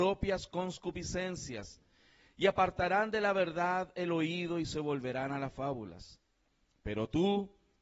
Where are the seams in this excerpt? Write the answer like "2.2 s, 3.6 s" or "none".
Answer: none